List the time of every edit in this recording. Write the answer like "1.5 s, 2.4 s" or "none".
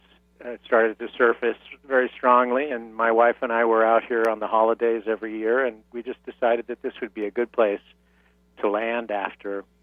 none